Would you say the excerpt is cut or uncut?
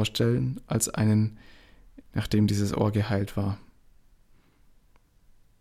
cut